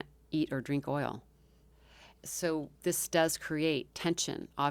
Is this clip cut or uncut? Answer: uncut